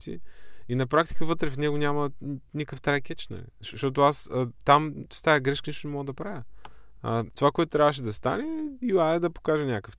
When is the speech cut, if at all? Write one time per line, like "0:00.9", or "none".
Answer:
none